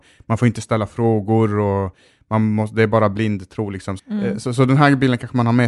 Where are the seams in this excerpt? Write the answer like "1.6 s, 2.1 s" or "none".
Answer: 4.0 s